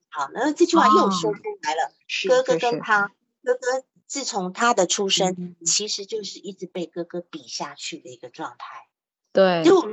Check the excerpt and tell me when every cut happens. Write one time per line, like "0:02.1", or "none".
none